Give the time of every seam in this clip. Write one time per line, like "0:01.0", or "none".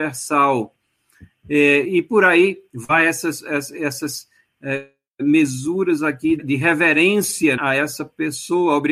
0:06.4
0:07.6